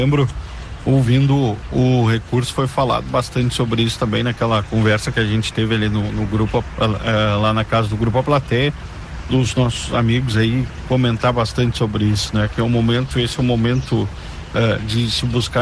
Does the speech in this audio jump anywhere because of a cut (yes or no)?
no